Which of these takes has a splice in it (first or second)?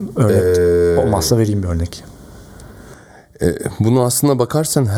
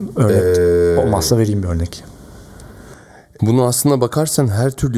second